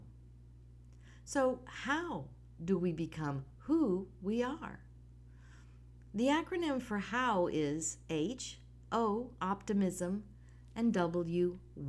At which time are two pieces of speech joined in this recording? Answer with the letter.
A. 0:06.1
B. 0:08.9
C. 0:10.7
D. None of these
B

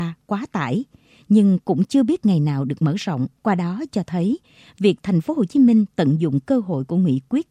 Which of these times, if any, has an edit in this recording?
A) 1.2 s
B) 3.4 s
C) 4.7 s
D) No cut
B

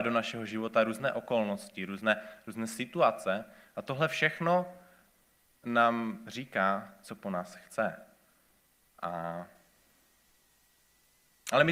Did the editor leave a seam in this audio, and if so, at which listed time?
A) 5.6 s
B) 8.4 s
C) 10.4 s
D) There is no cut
D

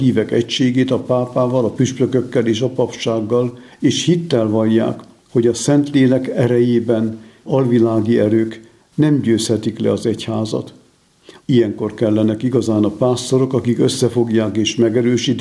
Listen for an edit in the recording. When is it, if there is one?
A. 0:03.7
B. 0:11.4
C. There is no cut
B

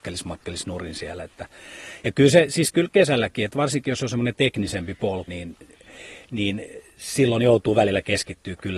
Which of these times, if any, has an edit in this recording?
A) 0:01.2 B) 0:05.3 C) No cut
B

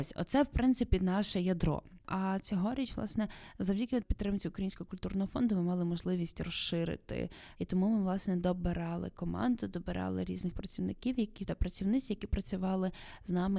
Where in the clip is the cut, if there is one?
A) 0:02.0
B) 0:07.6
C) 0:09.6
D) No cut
A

